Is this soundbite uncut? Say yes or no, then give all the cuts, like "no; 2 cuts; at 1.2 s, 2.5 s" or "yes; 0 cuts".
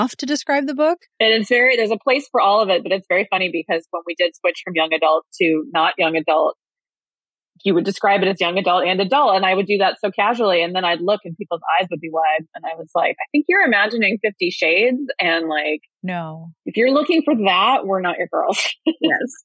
no; 1 cut; at 16.6 s